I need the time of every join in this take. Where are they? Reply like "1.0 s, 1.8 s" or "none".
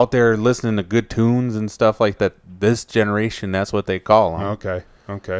2.2 s